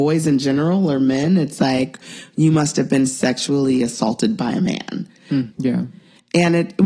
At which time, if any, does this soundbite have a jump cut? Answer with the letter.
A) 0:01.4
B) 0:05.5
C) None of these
B